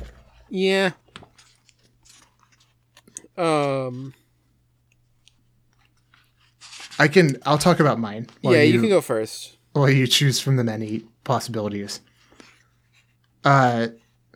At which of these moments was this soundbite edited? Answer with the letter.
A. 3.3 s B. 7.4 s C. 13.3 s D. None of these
B